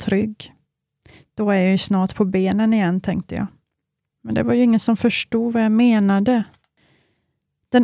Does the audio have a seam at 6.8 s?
no; 1 cut; at 4.1 s

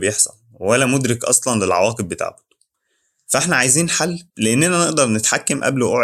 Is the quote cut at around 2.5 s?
no; 1 cut; at 4.3 s

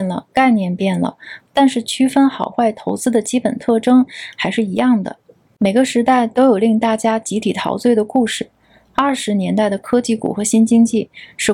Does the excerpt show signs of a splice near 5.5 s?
no; 1 cut; at 1.4 s

